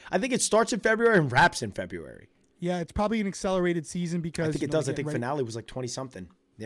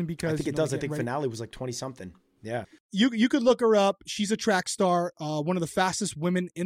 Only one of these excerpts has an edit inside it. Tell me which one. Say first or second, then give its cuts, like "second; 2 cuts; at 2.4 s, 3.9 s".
second; 1 cut; at 2.6 s